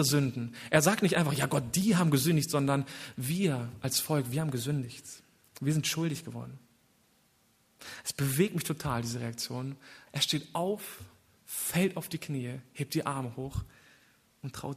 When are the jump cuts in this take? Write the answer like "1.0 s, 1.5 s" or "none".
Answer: 10.1 s